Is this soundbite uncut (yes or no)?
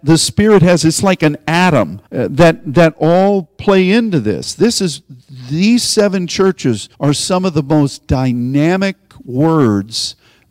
no